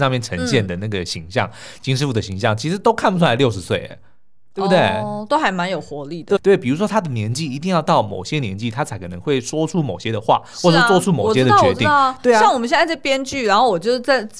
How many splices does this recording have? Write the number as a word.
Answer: one